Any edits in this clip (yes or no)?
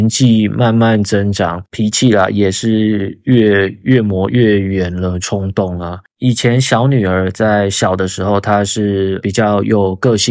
yes